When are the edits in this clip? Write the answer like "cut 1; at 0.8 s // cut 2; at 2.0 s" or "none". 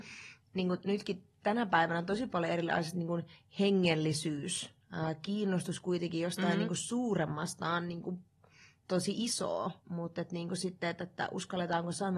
cut 1; at 9.8 s